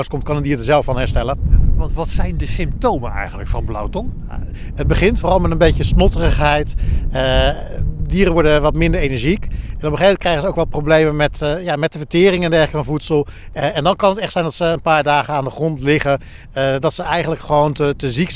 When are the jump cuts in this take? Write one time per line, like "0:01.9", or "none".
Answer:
none